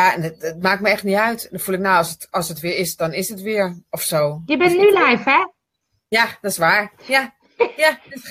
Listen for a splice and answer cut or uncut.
uncut